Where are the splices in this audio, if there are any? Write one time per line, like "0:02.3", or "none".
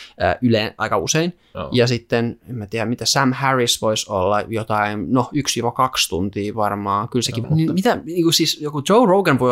0:07.4